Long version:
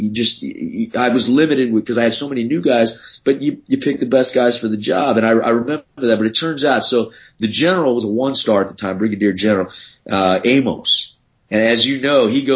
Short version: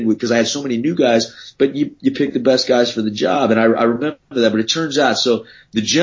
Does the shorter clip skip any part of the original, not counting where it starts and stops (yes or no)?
no